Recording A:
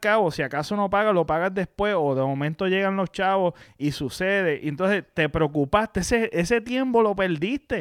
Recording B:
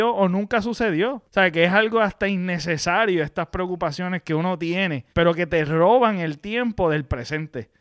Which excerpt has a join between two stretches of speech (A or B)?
B